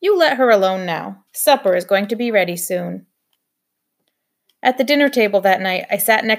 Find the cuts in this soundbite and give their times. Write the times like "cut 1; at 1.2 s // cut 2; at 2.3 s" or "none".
cut 1; at 1.3 s